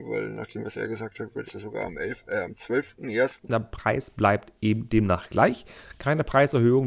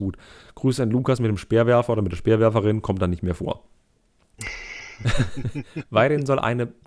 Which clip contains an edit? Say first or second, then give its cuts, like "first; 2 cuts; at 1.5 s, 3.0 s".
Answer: first; 2 cuts; at 1.5 s, 3.4 s